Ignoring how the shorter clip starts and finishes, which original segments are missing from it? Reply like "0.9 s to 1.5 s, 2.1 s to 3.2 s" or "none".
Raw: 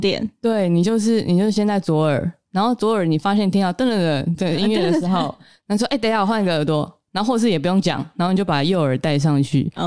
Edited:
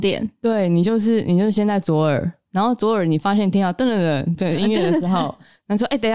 none